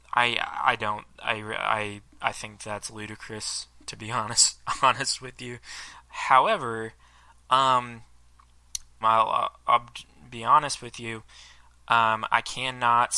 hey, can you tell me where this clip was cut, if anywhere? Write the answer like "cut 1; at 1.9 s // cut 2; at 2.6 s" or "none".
cut 1; at 6.0 s // cut 2; at 9.0 s